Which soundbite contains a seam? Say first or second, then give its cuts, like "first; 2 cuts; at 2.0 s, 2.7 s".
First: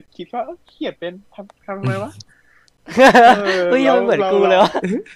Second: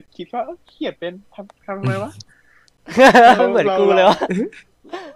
second; 1 cut; at 3.4 s